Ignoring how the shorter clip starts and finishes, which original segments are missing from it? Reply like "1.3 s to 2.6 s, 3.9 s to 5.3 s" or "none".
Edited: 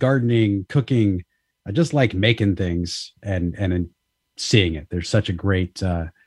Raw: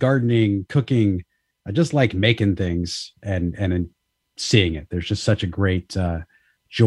5.0 s to 5.2 s

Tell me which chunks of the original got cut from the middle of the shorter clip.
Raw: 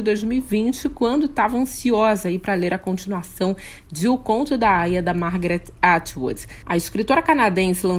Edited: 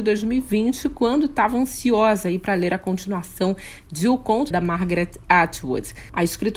4.5 s to 5.0 s

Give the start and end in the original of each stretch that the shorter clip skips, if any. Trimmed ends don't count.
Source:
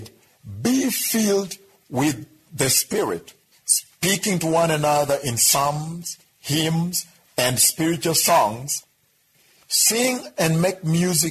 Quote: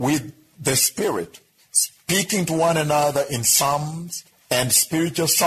6.3 s to 7.2 s

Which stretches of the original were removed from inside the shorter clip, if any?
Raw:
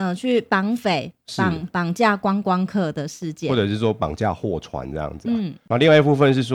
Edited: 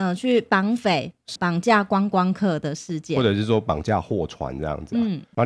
1.4 s to 1.7 s

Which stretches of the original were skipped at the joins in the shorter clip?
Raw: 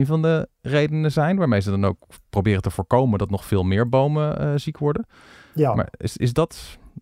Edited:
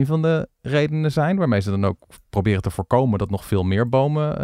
none

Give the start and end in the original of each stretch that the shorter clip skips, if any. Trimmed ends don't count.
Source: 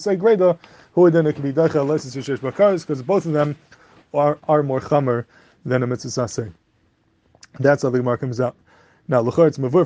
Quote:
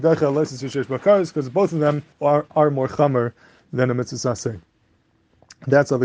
3.7 s to 4.0 s

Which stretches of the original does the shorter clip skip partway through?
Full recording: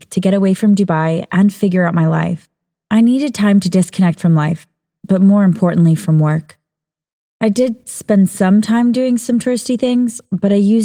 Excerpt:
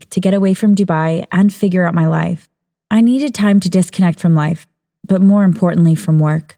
none

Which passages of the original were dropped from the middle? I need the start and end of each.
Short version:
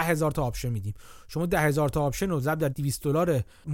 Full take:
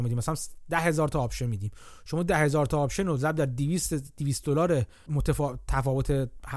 3.5 s to 4.1 s

